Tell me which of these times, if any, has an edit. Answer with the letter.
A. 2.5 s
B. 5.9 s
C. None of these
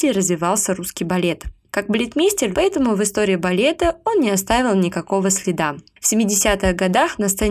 A